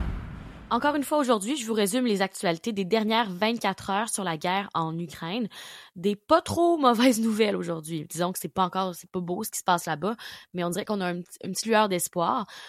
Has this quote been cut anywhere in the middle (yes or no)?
no